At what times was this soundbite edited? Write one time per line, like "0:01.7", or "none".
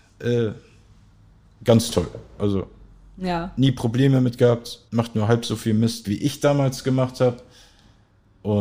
0:04.9
0:06.0